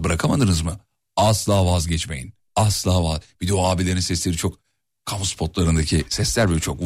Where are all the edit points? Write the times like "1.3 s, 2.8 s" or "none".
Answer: 2.5 s